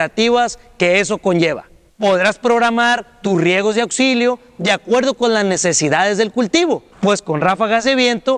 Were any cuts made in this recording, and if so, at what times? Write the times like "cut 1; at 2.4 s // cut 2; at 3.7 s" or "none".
cut 1; at 1.9 s // cut 2; at 6.9 s